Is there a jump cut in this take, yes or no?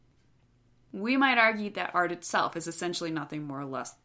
no